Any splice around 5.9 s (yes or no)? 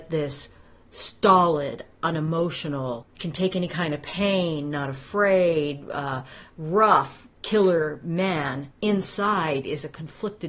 no